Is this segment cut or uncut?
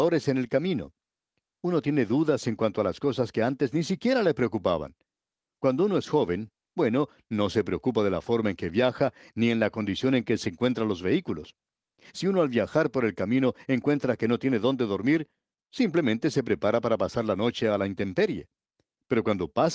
uncut